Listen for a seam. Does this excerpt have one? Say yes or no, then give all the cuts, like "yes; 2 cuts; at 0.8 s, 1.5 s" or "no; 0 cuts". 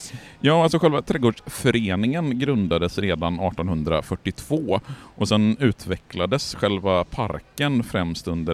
no; 0 cuts